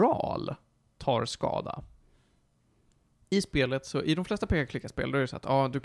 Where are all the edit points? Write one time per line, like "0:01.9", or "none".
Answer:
0:03.2